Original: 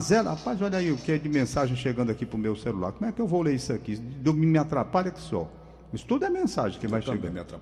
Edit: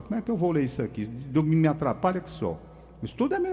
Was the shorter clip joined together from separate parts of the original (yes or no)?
no